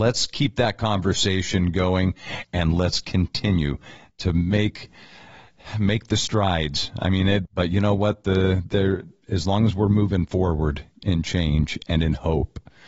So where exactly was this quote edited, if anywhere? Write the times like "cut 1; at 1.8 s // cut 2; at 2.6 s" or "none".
cut 1; at 7.5 s